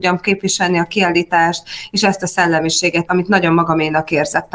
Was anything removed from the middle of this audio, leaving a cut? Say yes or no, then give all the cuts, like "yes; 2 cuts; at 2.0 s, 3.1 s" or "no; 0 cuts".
yes; 1 cut; at 3.1 s